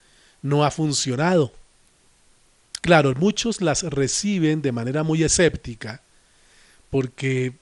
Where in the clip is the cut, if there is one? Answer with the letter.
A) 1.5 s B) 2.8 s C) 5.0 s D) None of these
B